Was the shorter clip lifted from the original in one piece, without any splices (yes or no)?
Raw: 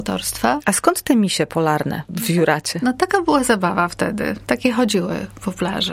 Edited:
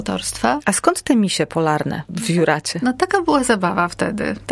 yes